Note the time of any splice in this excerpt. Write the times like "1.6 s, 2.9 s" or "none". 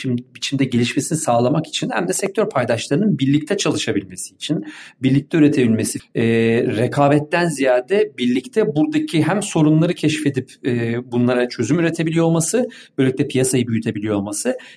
6.0 s